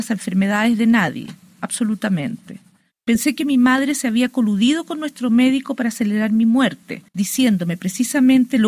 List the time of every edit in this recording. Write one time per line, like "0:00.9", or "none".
0:03.0
0:07.1